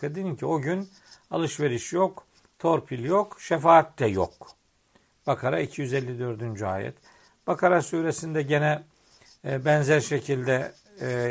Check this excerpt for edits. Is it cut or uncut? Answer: uncut